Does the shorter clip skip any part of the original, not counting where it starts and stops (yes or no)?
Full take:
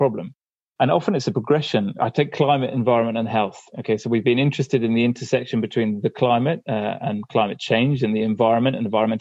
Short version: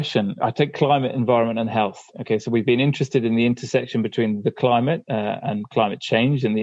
no